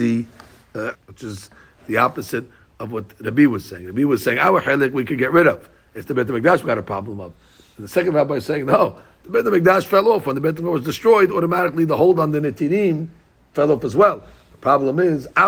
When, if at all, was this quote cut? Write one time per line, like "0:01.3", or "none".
0:00.9